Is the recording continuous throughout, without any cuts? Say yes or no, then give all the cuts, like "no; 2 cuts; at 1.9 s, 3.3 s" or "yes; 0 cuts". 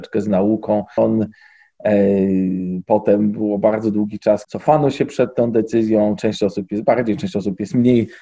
no; 2 cuts; at 1.0 s, 4.4 s